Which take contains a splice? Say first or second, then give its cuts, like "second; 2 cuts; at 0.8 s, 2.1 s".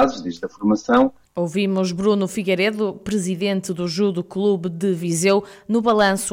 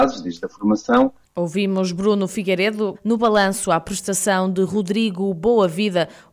second; 1 cut; at 2.9 s